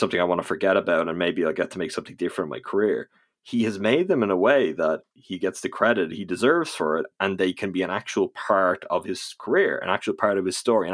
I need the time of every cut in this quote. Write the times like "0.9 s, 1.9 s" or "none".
none